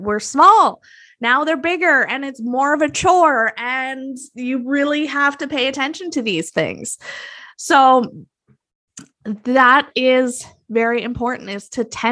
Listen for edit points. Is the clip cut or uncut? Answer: uncut